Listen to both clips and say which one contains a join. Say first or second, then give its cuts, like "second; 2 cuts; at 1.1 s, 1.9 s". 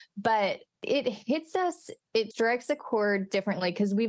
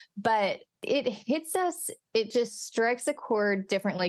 first; 1 cut; at 2.3 s